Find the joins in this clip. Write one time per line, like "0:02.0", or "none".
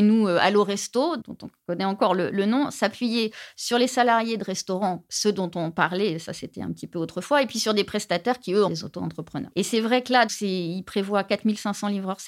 0:08.7
0:10.3